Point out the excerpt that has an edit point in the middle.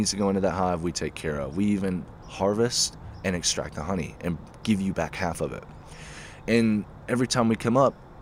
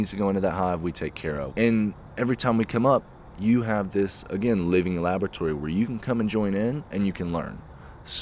second; 1 cut; at 1.5 s

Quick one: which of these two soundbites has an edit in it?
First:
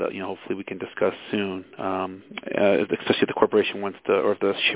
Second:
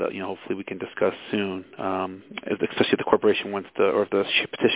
second; 1 cut; at 2.5 s

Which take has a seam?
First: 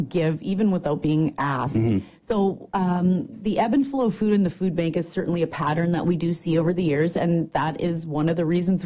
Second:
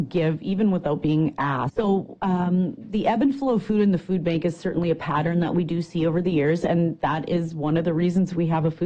second; 1 cut; at 1.7 s

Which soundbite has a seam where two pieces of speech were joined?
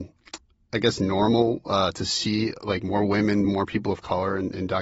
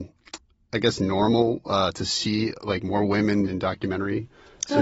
second; 1 cut; at 3.4 s

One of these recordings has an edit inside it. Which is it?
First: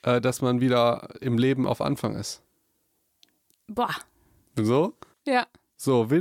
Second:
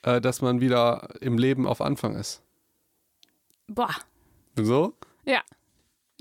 first; 1 cut; at 5.1 s

